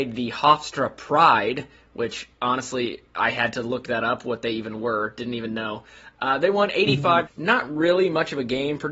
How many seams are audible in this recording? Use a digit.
1